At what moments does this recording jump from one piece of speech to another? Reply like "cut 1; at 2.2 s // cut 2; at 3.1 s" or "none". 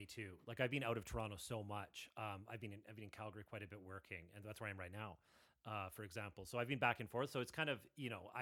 none

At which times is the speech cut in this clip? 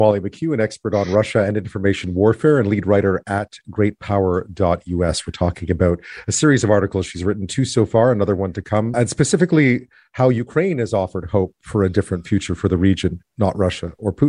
cut 1; at 8.9 s

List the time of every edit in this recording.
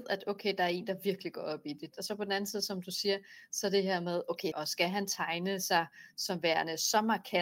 cut 1; at 1.9 s // cut 2; at 4.5 s

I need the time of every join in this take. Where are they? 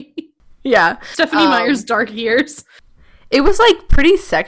none

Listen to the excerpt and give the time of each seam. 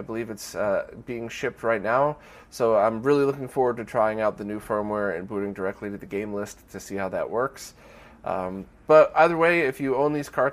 none

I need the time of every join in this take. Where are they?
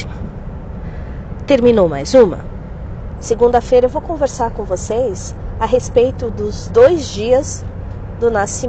cut 1; at 3.1 s

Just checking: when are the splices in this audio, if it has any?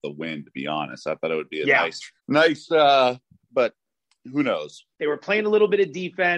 cut 1; at 2.2 s // cut 2; at 3.5 s // cut 3; at 4.9 s

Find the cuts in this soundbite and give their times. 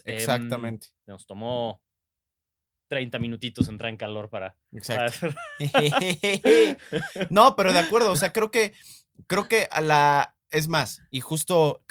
none

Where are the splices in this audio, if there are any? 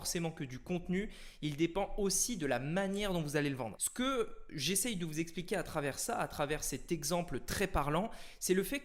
cut 1; at 3.8 s

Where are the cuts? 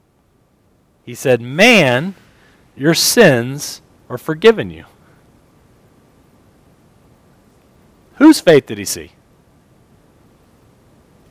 none

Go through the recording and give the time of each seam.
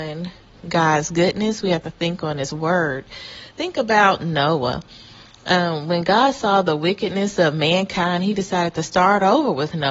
none

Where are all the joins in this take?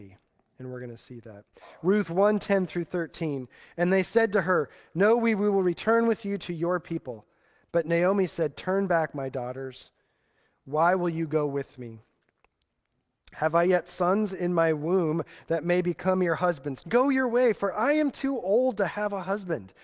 cut 1; at 16.8 s

